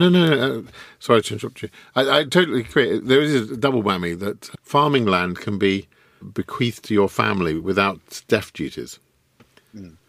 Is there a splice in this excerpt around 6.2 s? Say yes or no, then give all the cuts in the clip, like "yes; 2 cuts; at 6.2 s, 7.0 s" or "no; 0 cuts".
yes; 1 cut; at 6.2 s